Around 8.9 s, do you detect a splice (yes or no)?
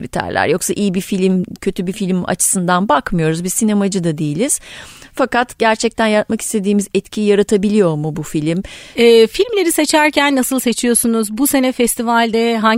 yes